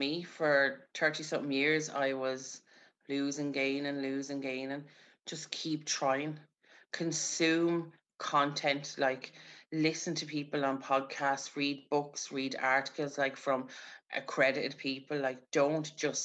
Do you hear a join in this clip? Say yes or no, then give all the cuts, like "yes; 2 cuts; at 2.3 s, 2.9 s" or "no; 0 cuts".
no; 0 cuts